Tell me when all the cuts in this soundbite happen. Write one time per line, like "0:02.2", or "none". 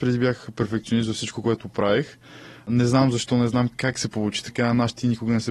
none